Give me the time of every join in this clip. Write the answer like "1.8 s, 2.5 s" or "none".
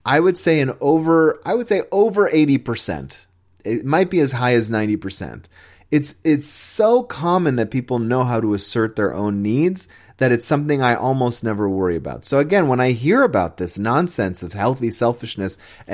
none